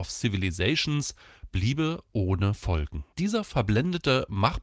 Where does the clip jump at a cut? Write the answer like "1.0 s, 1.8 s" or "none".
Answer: 3.1 s